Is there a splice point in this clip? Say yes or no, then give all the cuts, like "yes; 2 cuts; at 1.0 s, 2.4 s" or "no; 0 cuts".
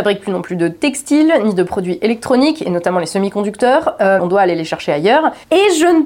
yes; 1 cut; at 4.2 s